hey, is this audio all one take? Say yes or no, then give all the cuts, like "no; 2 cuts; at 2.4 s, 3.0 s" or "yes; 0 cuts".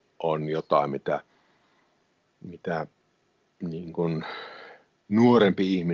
yes; 0 cuts